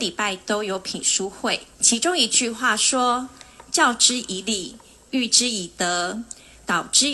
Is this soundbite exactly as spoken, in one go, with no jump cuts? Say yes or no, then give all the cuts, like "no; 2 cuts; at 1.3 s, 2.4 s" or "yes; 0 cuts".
no; 1 cut; at 1.7 s